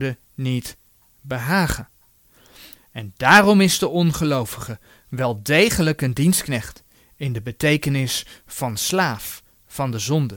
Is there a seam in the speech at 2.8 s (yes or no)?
yes